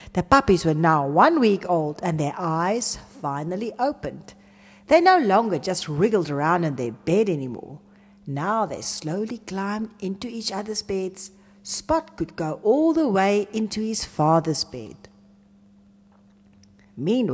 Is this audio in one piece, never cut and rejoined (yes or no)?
yes